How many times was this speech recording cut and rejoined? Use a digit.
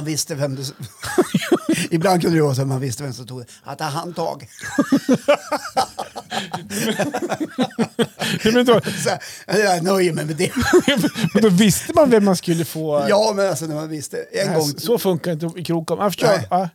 0